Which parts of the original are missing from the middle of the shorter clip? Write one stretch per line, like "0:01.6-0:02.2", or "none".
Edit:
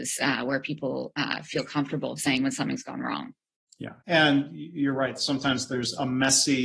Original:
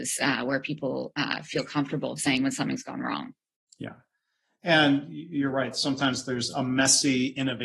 0:04.0-0:04.6